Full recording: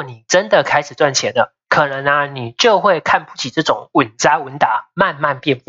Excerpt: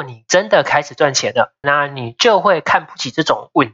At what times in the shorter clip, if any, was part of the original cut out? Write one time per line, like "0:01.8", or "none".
0:01.6